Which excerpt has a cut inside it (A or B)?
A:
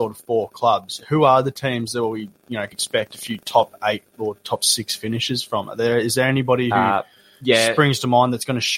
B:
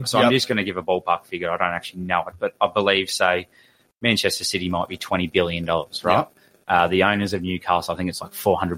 A